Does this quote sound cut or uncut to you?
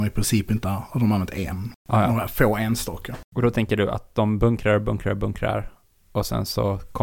uncut